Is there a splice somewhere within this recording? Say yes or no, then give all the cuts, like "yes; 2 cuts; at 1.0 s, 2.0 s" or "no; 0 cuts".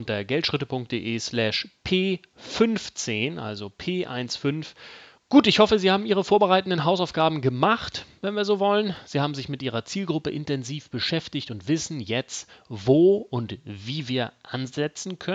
yes; 1 cut; at 5.1 s